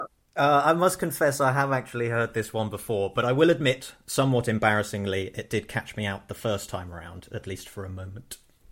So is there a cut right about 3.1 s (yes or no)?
no